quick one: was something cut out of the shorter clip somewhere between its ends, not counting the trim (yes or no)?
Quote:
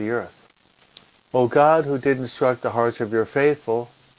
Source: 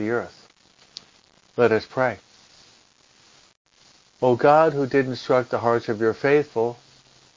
yes